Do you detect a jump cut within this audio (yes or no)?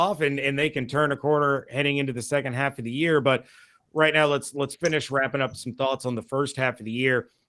no